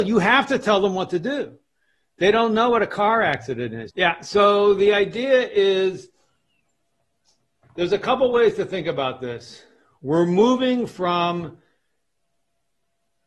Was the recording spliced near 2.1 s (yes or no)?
no